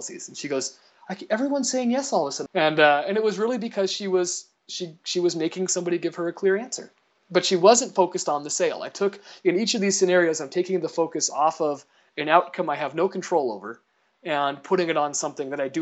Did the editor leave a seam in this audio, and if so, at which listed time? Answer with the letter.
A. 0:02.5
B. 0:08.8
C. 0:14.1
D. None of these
A